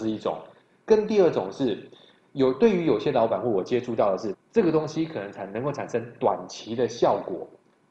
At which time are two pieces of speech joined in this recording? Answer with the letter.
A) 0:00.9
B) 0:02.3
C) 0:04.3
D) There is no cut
C